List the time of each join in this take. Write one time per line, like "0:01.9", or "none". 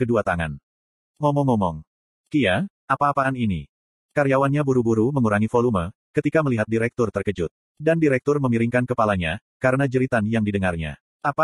0:01.0